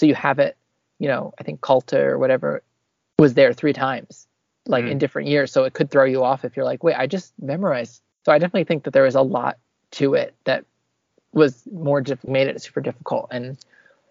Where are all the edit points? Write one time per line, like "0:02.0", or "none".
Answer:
0:08.1
0:11.1
0:12.3